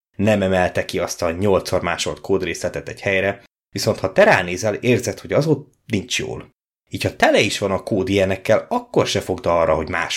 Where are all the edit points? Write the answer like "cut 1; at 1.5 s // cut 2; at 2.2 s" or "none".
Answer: none